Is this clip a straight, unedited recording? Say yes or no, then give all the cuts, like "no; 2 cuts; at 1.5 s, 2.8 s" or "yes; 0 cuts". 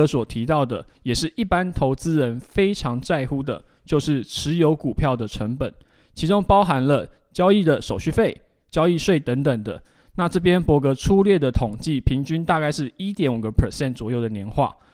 yes; 0 cuts